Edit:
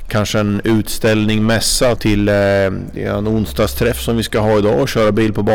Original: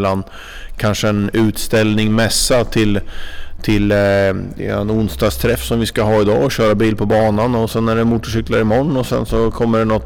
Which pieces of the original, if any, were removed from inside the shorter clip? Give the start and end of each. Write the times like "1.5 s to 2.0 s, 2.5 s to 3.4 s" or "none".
2.6 s to 3.6 s